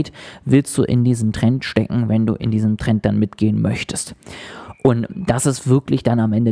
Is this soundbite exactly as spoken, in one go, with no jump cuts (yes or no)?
yes